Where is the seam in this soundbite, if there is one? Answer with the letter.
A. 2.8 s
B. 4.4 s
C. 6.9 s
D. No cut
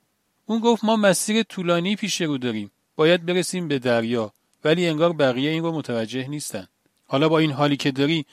C